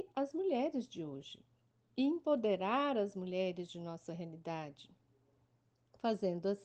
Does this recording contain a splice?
no; 0 cuts

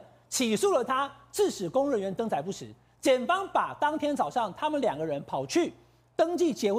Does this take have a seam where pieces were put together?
no; 0 cuts

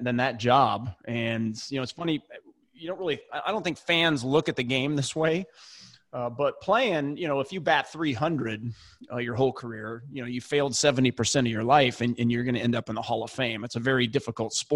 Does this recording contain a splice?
no; 0 cuts

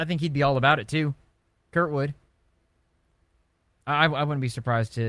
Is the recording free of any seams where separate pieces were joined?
yes; 0 cuts

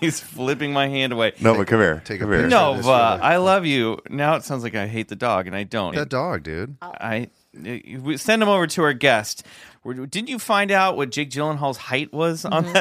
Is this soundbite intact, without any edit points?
no; 2 cuts; at 5.9 s, 9.7 s

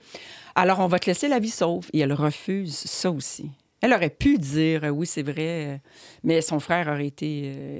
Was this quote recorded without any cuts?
yes; 0 cuts

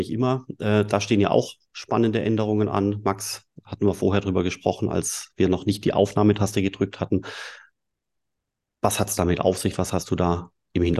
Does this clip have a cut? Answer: no; 0 cuts

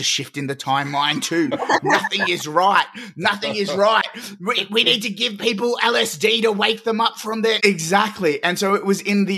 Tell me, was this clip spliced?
yes; 1 cut; at 7.6 s

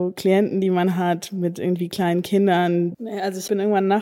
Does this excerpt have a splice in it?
yes; 1 cut; at 2.9 s

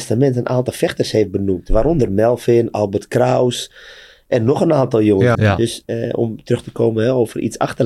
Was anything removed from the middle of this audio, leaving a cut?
yes; 1 cut; at 5.3 s

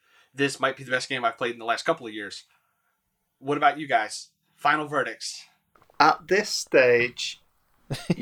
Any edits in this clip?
no; 0 cuts

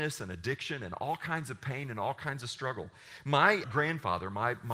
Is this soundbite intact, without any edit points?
no; 1 cut; at 3.6 s

